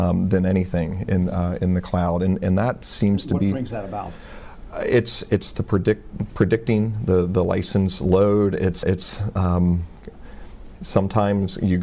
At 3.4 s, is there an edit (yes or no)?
no